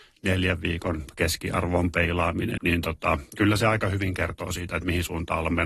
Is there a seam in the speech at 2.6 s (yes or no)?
yes